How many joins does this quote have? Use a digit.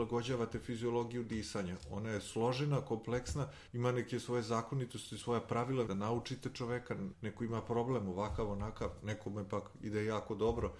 3